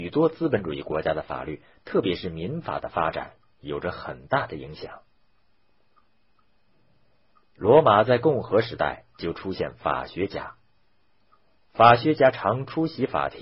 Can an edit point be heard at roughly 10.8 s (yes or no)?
no